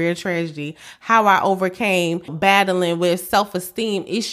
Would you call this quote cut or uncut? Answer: cut